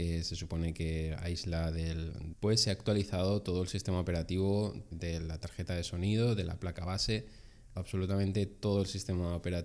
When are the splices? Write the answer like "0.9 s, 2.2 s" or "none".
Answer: 2.3 s, 4.9 s, 7.8 s